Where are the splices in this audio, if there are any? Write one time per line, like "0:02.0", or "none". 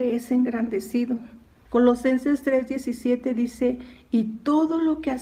0:01.7